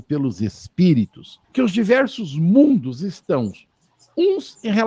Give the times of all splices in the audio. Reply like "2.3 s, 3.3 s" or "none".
1.4 s